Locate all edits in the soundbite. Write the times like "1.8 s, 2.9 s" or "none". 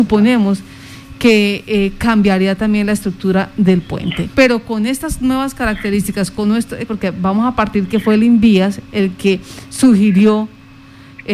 4.3 s, 6.9 s